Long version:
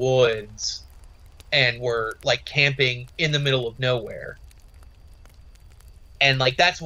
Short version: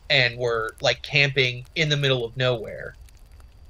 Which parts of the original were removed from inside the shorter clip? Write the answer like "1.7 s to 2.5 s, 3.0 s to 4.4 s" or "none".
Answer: none